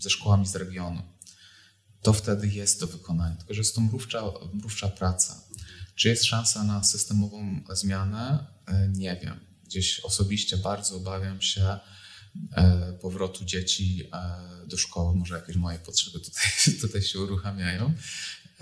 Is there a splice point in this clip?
no; 0 cuts

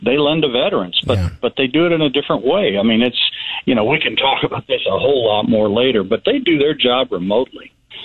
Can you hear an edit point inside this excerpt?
no; 0 cuts

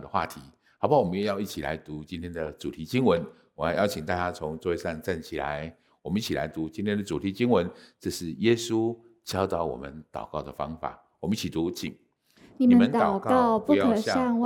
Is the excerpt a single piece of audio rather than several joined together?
yes; 0 cuts

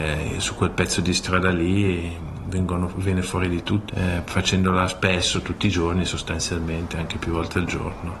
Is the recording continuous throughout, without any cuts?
no; 1 cut; at 3.9 s

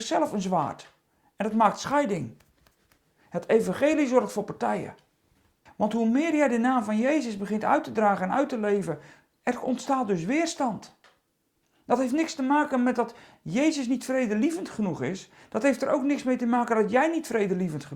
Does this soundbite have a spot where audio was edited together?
yes; 1 cut; at 5.7 s

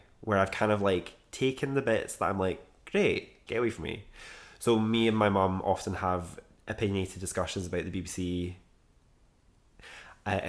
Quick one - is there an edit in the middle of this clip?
yes; 1 cut; at 3.5 s

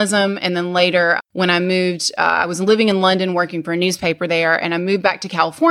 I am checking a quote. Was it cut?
yes; 1 cut; at 1.2 s

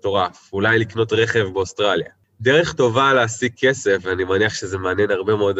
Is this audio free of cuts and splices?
yes; 0 cuts

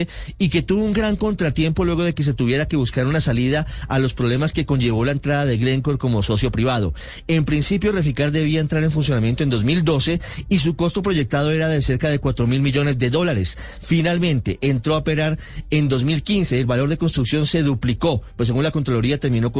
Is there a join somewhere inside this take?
no; 0 cuts

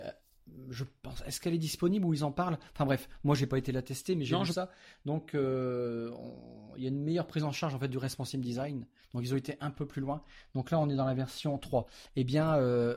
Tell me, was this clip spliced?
no; 0 cuts

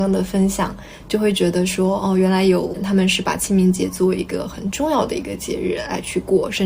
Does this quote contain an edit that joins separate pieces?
yes; 1 cut; at 2.7 s

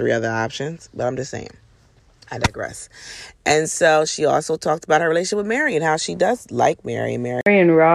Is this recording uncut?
yes; 0 cuts

